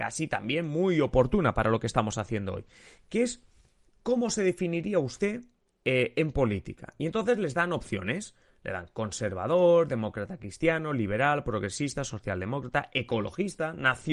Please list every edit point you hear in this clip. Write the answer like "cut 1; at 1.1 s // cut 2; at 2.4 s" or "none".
none